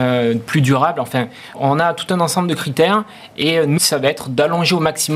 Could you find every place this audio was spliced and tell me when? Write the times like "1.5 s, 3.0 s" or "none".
1.5 s, 3.8 s